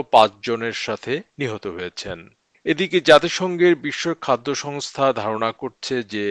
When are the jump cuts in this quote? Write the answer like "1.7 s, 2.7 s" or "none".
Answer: none